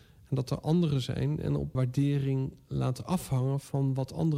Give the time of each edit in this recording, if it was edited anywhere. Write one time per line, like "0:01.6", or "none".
0:01.7